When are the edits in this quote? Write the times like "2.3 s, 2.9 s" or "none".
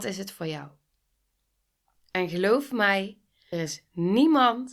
3.5 s